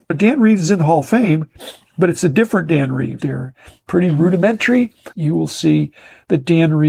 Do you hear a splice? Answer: yes; 2 cuts; at 3.2 s, 5.1 s

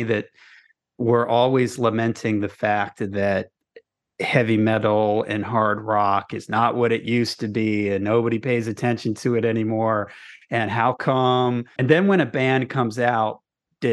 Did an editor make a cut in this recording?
yes; 1 cut; at 11.8 s

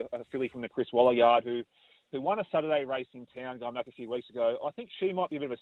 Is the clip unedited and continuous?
yes; 0 cuts

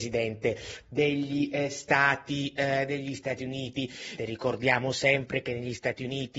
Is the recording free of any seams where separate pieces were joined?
no; 1 cut; at 4.2 s

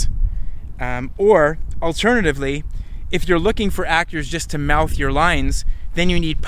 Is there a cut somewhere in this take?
no; 0 cuts

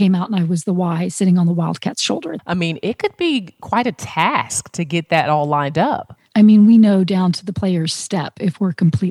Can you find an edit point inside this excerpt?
yes; 2 cuts; at 2.4 s, 6.3 s

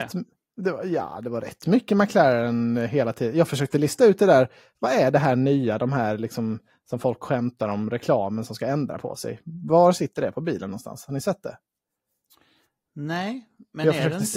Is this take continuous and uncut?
yes; 0 cuts

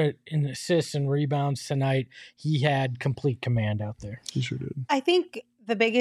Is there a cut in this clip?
no; 0 cuts

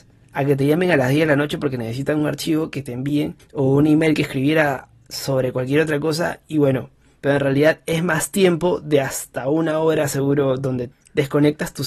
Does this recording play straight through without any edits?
no; 1 cut; at 7.2 s

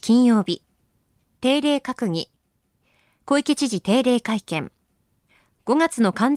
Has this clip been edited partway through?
no; 0 cuts

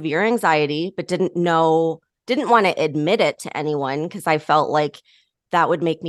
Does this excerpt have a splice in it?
no; 0 cuts

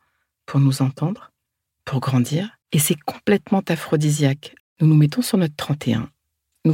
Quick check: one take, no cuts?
no; 2 cuts; at 2.6 s, 4.6 s

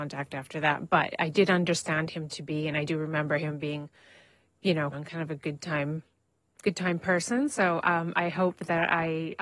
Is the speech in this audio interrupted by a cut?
yes; 1 cut; at 4.9 s

